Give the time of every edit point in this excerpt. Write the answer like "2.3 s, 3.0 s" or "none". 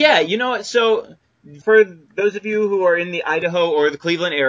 1.6 s